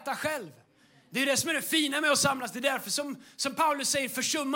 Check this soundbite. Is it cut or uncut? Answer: uncut